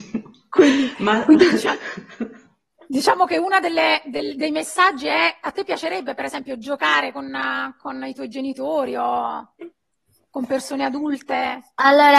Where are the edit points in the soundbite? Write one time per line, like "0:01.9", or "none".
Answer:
none

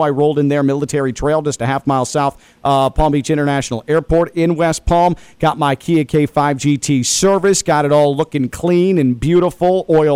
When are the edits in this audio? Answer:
none

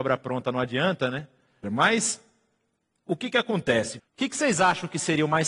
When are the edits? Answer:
0:01.6
0:04.0

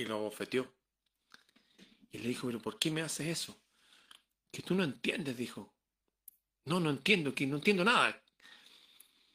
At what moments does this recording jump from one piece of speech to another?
none

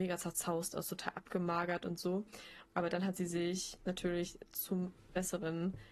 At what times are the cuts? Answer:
0:02.7

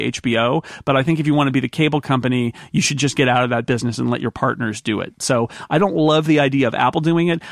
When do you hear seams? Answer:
none

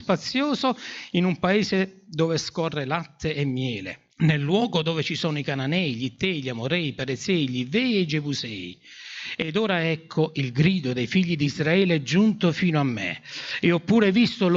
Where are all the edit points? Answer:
0:04.1

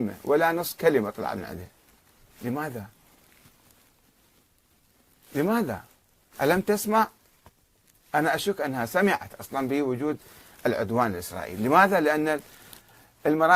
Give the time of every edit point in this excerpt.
none

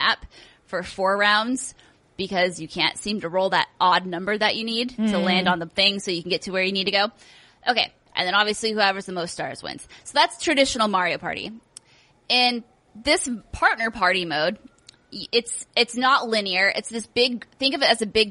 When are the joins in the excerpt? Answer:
0:08.1

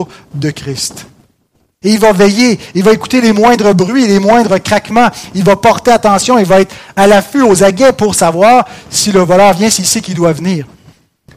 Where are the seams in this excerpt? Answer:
0:01.8
0:07.0

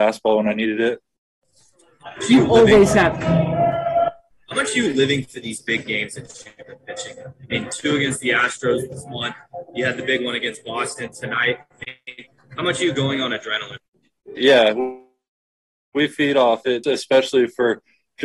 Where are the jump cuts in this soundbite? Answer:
0:14.4
0:16.8

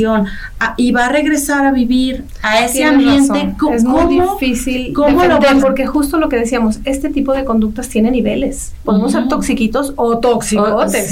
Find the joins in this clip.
0:05.6

